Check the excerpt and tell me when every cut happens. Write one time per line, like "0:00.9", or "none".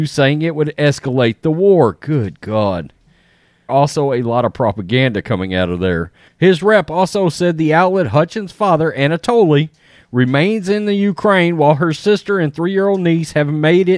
0:03.7
0:06.3